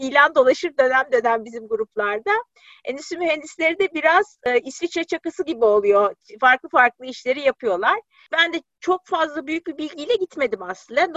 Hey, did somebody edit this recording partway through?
yes; 1 cut; at 8.2 s

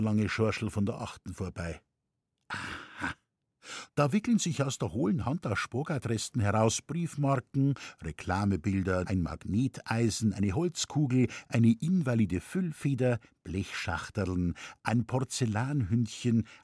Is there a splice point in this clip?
yes; 2 cuts; at 3.9 s, 9.0 s

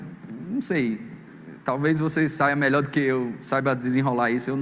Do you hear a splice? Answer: no; 0 cuts

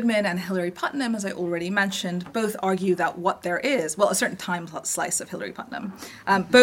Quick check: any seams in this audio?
no; 0 cuts

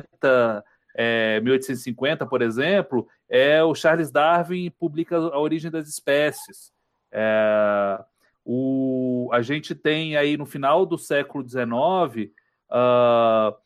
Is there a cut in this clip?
no; 0 cuts

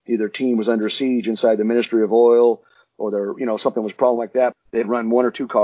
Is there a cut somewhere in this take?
yes; 1 cut; at 4.5 s

